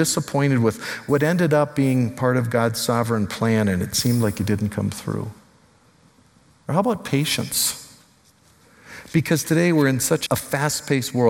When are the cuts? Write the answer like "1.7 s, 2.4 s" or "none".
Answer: 10.3 s